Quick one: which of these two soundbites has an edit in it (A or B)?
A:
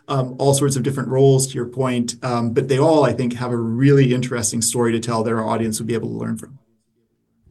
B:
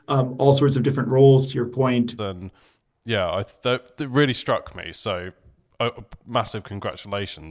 B